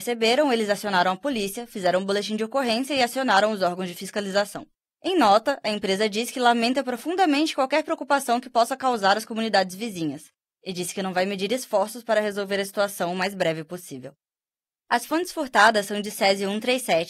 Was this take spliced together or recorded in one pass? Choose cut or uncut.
uncut